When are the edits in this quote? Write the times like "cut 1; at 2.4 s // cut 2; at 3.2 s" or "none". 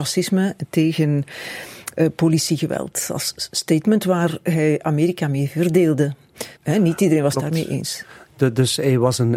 cut 1; at 3.5 s // cut 2; at 6.6 s